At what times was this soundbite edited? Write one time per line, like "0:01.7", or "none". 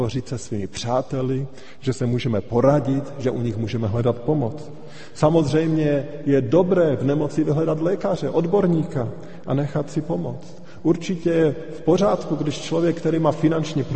none